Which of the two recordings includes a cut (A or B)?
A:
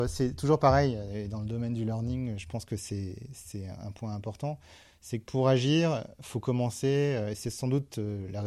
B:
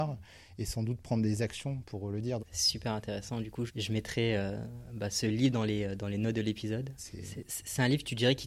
B